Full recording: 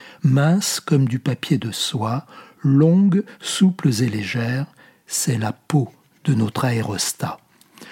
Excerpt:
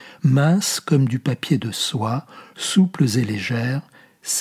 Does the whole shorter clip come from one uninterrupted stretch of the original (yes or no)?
no